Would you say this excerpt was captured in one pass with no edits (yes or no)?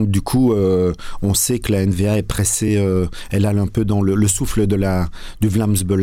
yes